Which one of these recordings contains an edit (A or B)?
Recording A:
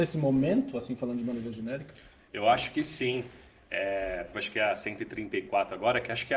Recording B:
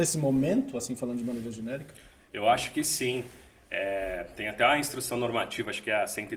A